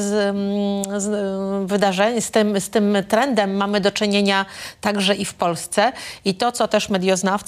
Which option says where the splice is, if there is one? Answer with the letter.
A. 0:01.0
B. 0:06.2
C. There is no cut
C